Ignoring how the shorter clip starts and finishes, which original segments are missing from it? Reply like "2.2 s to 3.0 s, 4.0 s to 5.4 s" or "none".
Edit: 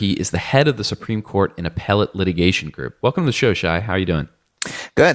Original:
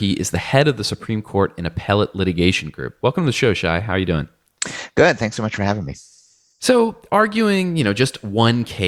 none